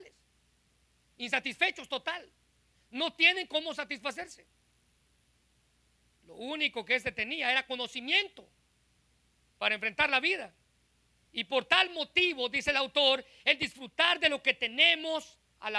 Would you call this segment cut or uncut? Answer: uncut